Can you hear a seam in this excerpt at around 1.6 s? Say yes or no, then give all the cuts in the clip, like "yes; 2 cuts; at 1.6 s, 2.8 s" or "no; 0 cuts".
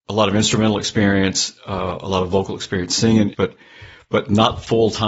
no; 1 cut; at 3.3 s